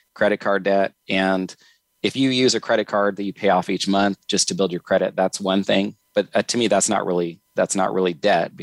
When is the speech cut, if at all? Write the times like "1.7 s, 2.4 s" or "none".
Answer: none